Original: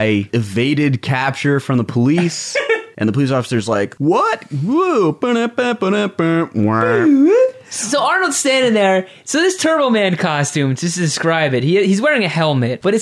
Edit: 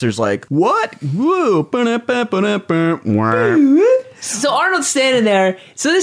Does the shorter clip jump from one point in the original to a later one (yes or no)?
no